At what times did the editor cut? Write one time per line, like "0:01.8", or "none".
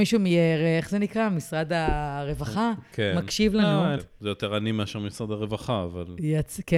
0:04.0